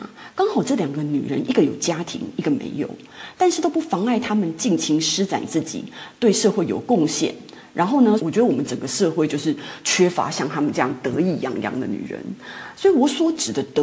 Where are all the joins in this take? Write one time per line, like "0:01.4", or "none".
0:08.2